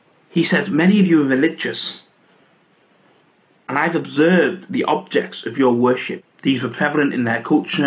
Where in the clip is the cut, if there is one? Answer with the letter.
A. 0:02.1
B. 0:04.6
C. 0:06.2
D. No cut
C